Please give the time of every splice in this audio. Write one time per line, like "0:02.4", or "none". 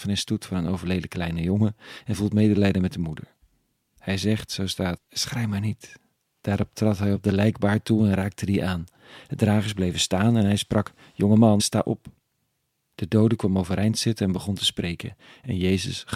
0:05.0
0:11.6